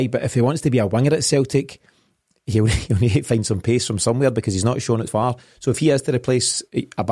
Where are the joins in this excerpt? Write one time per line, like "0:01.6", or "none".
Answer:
0:05.1